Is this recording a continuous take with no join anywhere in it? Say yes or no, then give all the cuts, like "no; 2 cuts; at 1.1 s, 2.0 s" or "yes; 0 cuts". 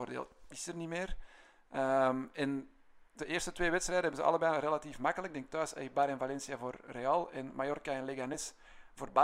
yes; 0 cuts